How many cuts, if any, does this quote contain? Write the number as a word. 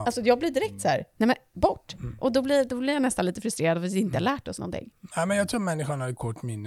zero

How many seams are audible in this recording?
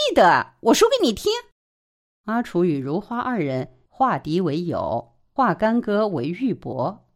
one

